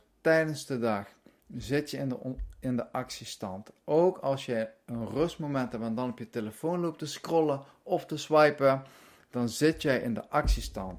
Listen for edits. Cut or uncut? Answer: uncut